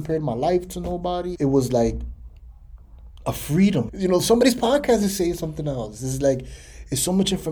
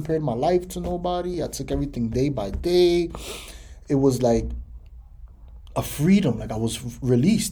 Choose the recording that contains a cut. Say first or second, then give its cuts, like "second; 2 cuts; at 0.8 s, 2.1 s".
first; 2 cuts; at 1.3 s, 3.9 s